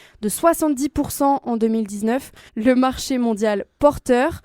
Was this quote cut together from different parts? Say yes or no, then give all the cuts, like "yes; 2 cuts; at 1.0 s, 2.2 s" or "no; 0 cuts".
yes; 1 cut; at 2.5 s